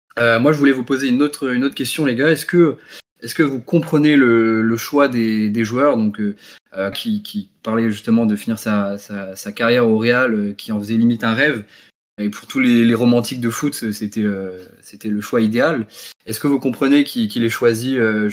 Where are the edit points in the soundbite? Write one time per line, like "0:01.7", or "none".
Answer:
0:06.9